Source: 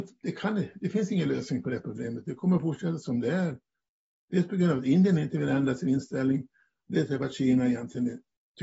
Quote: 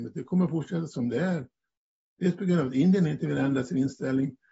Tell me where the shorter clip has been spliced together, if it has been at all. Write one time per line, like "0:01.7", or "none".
none